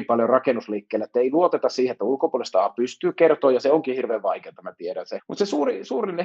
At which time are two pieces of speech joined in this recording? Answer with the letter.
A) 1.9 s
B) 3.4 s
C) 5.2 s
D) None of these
C